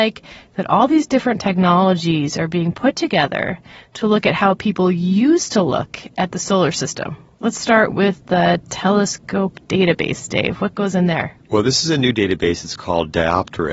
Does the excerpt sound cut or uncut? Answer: uncut